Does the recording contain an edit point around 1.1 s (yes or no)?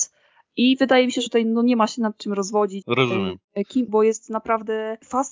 no